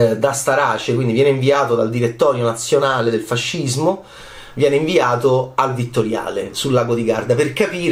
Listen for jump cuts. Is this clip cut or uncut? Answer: uncut